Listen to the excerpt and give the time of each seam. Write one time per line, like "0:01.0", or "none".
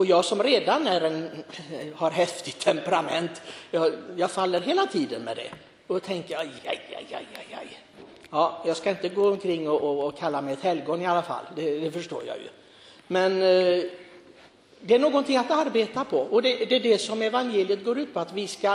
0:06.6